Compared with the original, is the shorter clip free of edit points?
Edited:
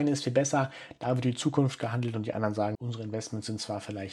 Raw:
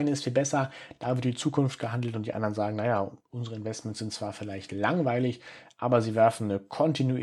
no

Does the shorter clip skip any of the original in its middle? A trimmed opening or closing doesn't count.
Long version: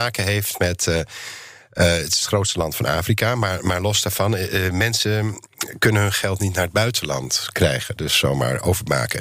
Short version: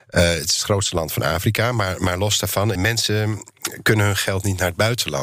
yes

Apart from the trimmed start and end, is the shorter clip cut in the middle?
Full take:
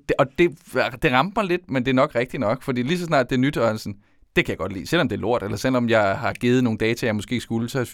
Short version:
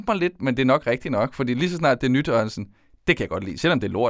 no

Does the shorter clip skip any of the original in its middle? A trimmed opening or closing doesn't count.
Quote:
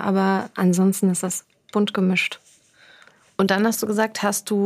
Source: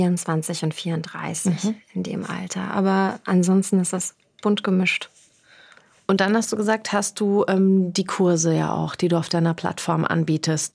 no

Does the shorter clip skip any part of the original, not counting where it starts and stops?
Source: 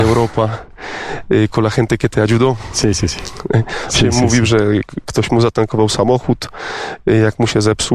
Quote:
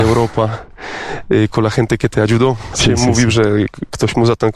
yes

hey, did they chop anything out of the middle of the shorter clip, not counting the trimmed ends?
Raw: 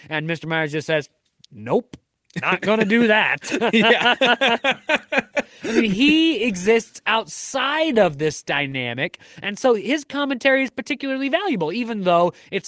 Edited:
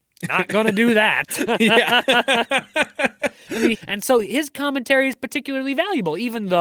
yes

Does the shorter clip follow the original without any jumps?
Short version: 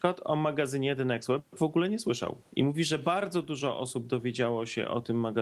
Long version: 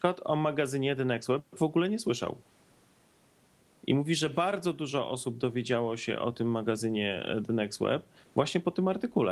no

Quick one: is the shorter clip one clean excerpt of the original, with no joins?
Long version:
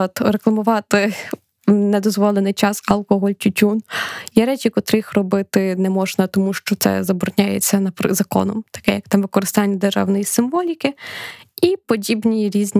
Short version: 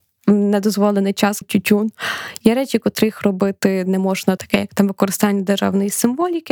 no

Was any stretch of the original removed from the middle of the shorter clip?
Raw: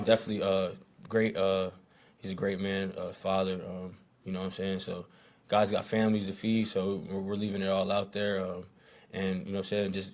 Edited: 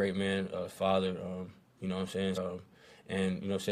yes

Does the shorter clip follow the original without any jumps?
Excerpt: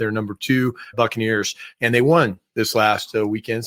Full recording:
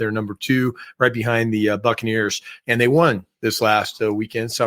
no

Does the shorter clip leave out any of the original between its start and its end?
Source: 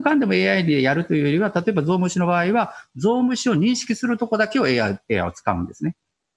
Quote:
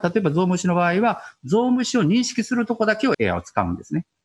yes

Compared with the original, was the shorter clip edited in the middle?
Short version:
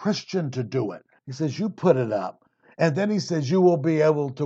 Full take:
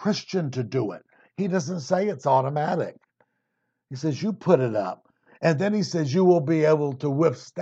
yes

